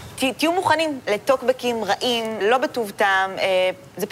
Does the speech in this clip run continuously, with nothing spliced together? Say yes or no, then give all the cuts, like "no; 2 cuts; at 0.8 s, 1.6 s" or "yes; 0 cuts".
no; 1 cut; at 2.4 s